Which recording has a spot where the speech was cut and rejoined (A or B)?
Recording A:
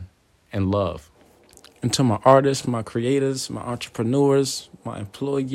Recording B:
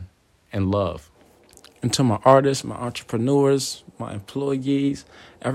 B